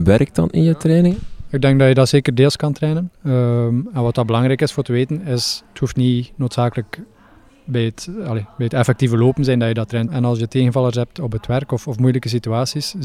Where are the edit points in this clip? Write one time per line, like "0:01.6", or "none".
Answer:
0:10.1